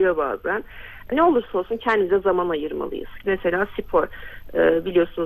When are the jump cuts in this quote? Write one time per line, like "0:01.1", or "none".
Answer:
0:01.1
0:03.2